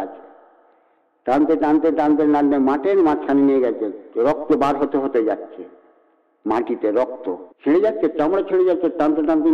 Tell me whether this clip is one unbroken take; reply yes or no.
no